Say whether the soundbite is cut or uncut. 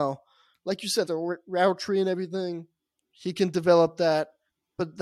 cut